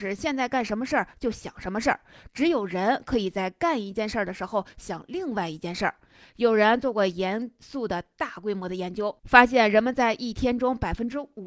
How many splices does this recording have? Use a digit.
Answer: 1